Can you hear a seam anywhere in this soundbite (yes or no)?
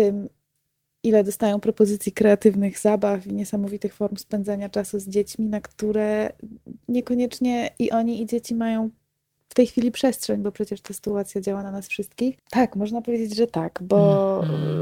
yes